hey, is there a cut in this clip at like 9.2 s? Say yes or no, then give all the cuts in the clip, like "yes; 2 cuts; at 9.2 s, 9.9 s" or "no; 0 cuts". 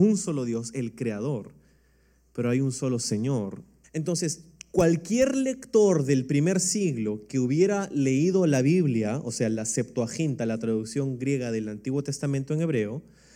no; 1 cut; at 3.8 s